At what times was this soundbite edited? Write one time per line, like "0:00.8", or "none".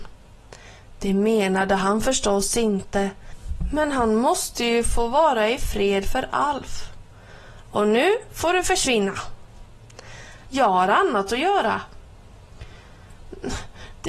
0:10.5

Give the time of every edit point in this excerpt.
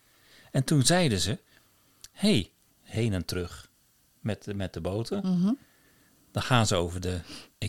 0:02.7

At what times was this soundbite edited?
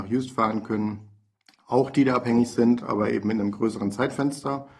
none

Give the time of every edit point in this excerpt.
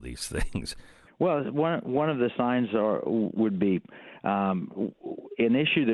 0:01.1

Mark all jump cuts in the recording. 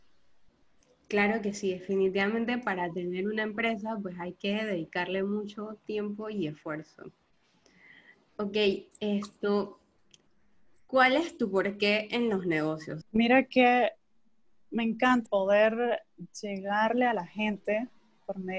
0:13.0
0:15.3

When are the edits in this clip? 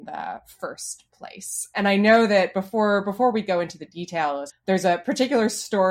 0:04.5

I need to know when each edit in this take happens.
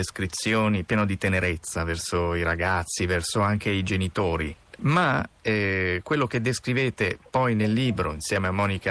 0:04.8

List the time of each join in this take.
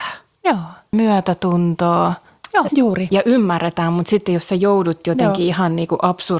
0:00.9
0:02.7

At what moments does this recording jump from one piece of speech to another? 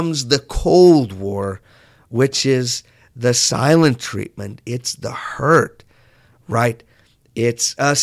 none

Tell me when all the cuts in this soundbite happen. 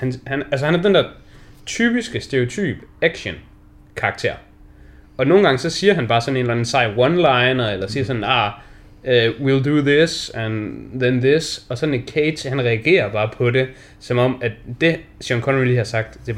none

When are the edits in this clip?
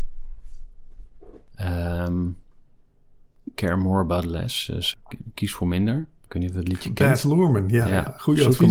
0:06.2

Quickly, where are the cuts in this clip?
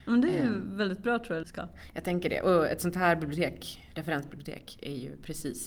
0:01.4

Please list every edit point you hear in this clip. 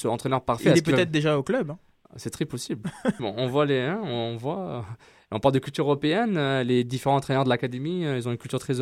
0:03.2

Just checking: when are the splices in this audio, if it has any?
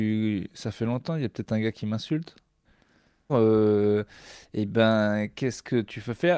0:03.3

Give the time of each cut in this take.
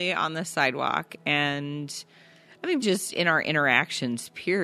0:02.8

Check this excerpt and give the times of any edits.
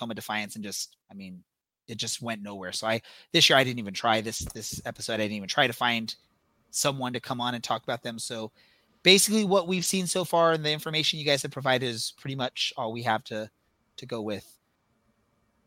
0:01.0

